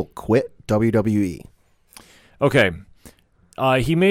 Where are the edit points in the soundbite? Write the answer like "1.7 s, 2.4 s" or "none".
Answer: none